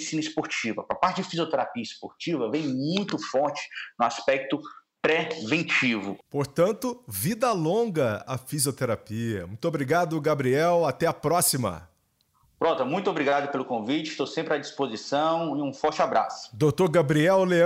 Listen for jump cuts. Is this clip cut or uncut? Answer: uncut